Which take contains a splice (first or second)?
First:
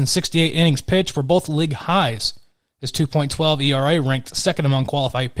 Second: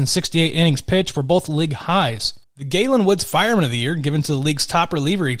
second